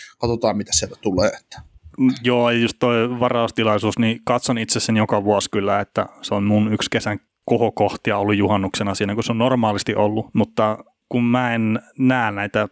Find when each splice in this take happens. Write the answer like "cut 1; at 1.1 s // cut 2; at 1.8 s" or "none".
cut 1; at 10.3 s